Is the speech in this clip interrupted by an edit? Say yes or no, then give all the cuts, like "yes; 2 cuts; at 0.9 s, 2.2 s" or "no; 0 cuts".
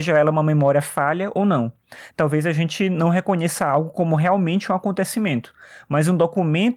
yes; 1 cut; at 2.1 s